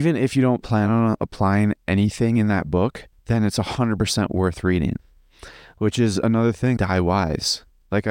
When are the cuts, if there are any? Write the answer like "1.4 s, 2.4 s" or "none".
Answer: 3.1 s, 6.8 s